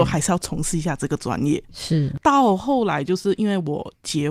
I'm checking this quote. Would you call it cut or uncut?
uncut